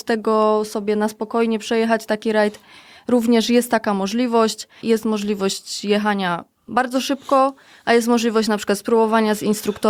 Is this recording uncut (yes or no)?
no